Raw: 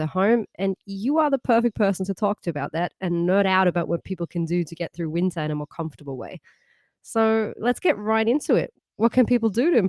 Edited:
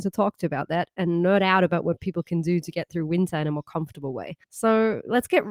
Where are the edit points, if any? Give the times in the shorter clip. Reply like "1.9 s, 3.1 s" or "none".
4.4 s